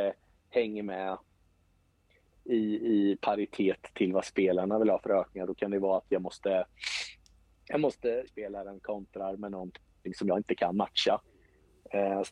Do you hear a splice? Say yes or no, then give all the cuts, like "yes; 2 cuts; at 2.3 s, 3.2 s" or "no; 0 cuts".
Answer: yes; 1 cut; at 8.3 s